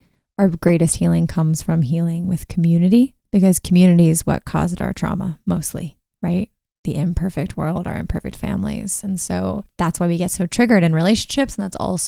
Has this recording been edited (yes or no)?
no